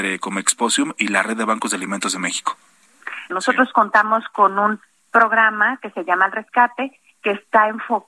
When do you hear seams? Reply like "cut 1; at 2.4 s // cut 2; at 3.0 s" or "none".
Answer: cut 1; at 3.3 s